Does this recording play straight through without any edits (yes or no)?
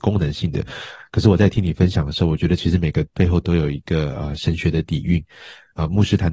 yes